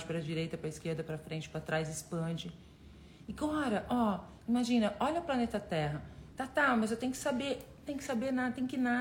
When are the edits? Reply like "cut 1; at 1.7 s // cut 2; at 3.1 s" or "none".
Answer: cut 1; at 3.3 s // cut 2; at 6.3 s

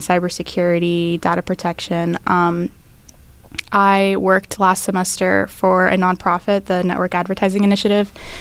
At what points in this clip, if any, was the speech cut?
none

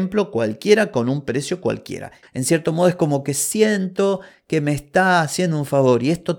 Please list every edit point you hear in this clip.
cut 1; at 2.2 s

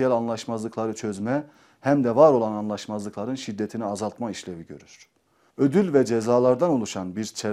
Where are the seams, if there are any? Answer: cut 1; at 5.5 s

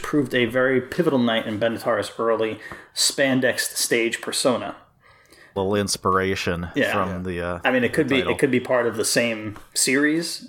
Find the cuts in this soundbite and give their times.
cut 1; at 5.6 s

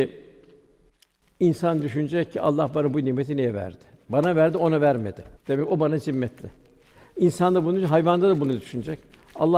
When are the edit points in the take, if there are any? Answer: cut 1; at 5.4 s

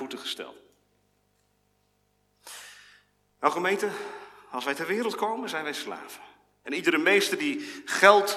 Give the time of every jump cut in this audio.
cut 1; at 6.6 s

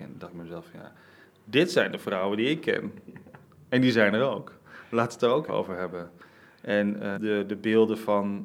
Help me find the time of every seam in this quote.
cut 1; at 5.5 s // cut 2; at 7.1 s

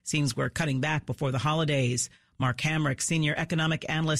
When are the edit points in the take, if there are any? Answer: none

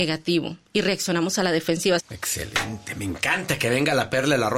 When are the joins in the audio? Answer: cut 1; at 2.0 s

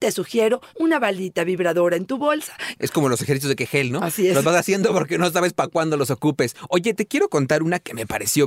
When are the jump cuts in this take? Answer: cut 1; at 2.8 s

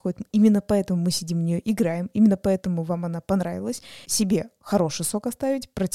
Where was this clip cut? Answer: cut 1; at 4.0 s

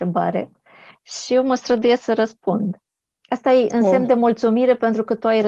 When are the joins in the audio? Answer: none

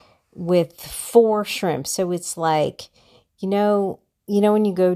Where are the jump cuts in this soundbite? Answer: none

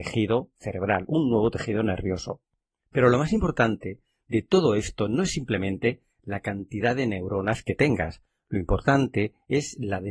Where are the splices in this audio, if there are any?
none

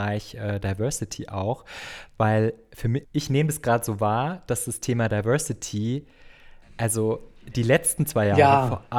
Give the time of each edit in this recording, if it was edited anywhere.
cut 1; at 3.0 s

